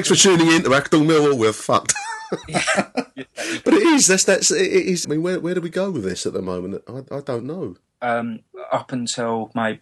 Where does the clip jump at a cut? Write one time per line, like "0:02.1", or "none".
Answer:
0:05.0